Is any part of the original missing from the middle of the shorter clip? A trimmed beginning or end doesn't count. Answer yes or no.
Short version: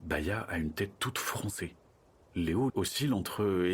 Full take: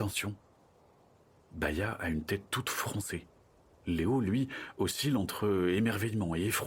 yes